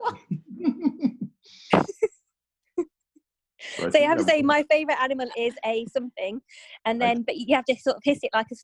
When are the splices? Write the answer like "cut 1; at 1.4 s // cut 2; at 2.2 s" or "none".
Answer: none